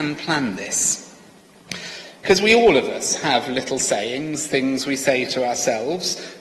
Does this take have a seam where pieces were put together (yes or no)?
yes